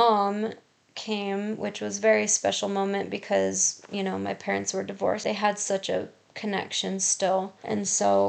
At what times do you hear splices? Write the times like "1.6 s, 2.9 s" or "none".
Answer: 5.2 s